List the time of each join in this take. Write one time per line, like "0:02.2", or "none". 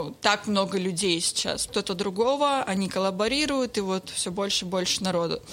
0:01.7